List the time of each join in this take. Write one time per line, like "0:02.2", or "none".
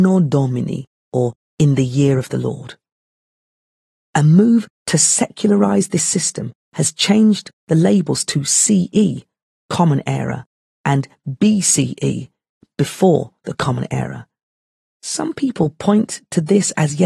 none